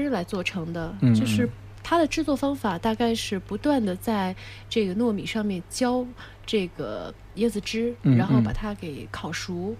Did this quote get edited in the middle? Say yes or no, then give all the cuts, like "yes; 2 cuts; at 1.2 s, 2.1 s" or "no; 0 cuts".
no; 0 cuts